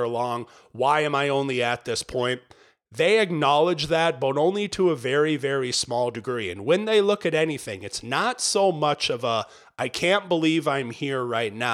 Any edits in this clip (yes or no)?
no